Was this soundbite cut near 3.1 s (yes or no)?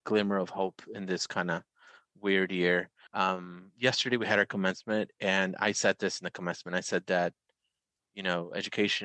yes